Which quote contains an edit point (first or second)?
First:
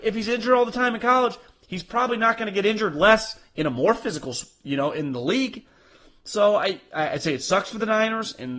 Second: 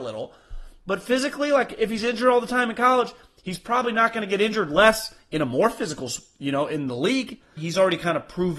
second